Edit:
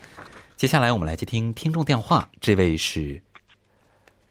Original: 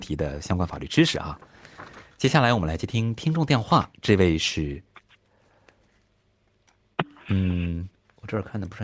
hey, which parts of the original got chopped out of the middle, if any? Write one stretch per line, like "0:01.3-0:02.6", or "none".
none